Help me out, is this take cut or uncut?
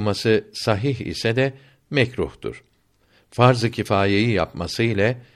uncut